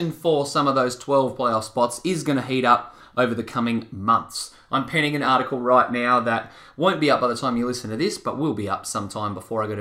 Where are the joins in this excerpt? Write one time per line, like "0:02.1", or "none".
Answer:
none